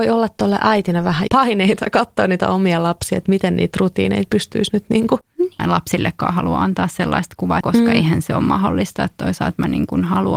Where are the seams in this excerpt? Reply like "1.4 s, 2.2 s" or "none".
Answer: 1.3 s, 5.6 s, 7.6 s